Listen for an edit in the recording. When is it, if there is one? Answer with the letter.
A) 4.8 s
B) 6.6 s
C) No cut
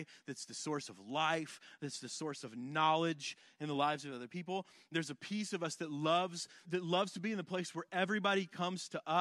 B